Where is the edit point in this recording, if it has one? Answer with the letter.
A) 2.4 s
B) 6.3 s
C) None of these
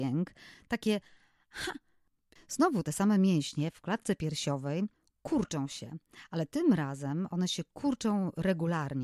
A